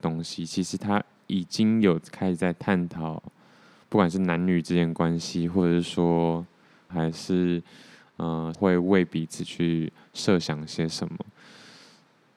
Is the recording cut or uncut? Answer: cut